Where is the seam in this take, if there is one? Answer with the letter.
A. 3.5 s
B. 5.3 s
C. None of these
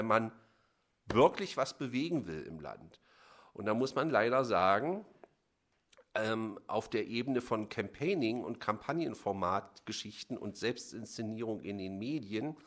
C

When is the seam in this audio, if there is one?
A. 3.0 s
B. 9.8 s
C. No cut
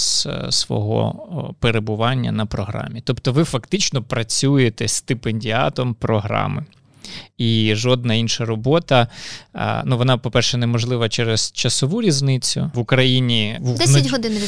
C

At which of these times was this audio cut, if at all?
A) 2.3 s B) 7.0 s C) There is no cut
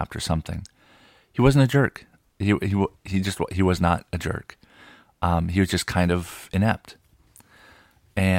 C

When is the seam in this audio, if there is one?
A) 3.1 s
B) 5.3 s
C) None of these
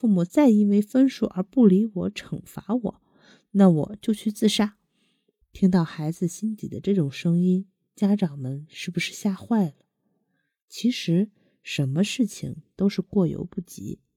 C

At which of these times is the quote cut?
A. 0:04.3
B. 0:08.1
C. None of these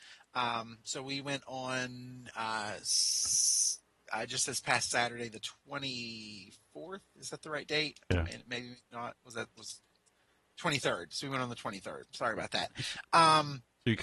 C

